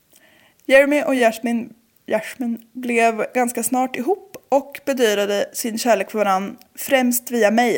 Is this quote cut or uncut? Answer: uncut